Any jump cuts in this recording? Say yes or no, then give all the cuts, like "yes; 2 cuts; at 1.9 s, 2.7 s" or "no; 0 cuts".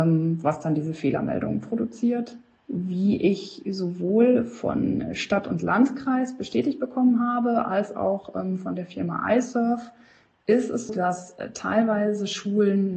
yes; 1 cut; at 10.9 s